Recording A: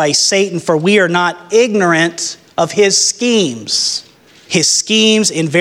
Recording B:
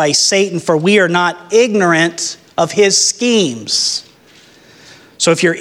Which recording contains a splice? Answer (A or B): A